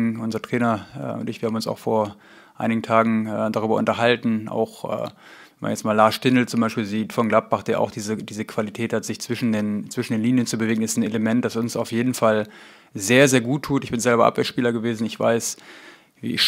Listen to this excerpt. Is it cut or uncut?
uncut